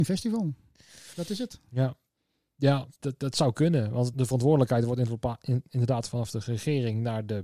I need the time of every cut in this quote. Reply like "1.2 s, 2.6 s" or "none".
3.0 s, 4.1 s